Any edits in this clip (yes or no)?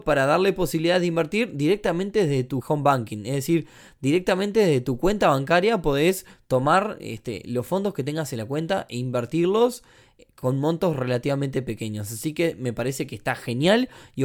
yes